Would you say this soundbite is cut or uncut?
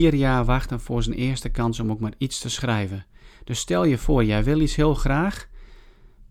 uncut